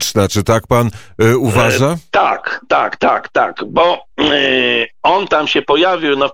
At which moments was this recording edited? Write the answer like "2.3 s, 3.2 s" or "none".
none